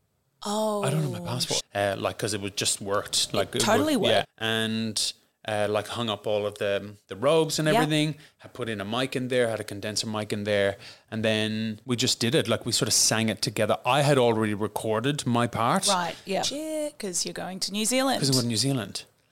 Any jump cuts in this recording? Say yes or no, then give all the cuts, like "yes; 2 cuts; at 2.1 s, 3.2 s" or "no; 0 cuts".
yes; 3 cuts; at 1.6 s, 4.2 s, 16.4 s